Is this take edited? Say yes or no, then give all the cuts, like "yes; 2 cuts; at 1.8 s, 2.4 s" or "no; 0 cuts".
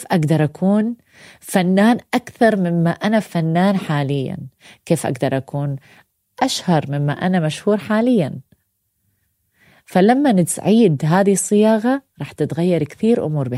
no; 0 cuts